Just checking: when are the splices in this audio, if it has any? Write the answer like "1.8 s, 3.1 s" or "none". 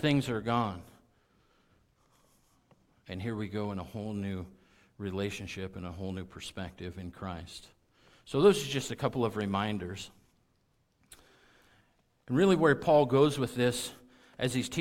none